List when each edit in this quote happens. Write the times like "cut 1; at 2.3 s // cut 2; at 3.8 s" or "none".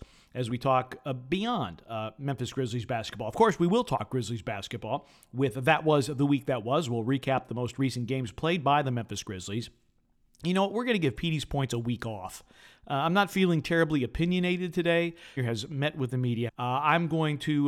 cut 1; at 15.4 s // cut 2; at 16.5 s